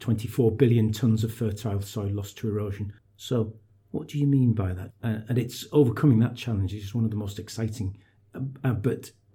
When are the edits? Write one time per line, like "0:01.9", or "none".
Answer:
0:03.0
0:04.9